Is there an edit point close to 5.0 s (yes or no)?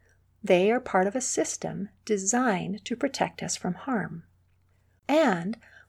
yes